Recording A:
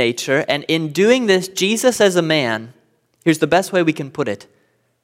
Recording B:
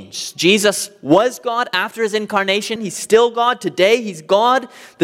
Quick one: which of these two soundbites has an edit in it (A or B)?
B